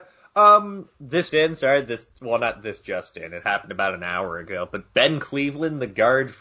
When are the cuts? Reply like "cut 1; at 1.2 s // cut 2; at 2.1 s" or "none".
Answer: cut 1; at 1.3 s